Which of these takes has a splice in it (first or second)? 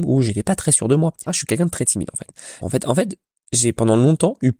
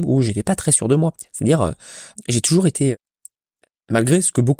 first